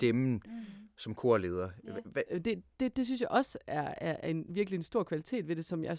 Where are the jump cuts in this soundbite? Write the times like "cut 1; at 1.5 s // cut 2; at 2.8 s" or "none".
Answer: cut 1; at 2.3 s

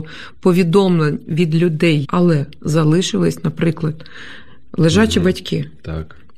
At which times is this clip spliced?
cut 1; at 2.0 s

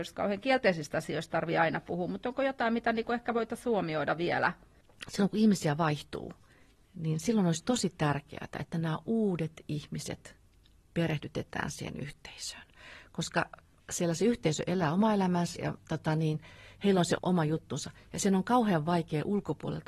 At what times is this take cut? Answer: cut 1; at 15.6 s // cut 2; at 17.2 s

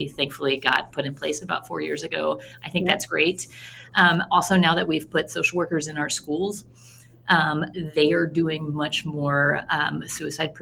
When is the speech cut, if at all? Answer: none

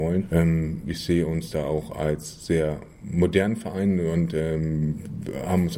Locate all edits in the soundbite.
none

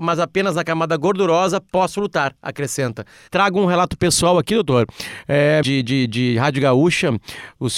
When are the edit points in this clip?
cut 1; at 3.3 s // cut 2; at 5.6 s

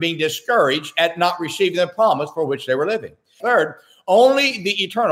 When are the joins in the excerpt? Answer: cut 1; at 3.4 s

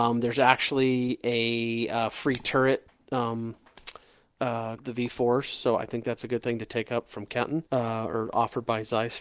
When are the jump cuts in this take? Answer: cut 1; at 4.8 s // cut 2; at 7.7 s

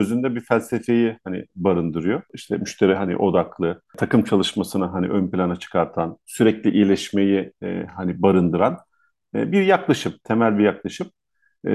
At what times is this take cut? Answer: none

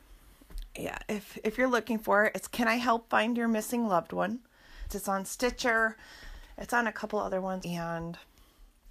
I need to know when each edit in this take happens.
cut 1; at 4.9 s // cut 2; at 7.6 s

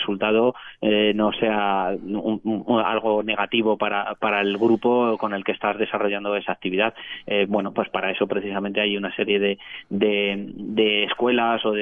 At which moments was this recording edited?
none

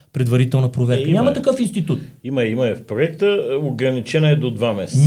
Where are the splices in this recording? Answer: none

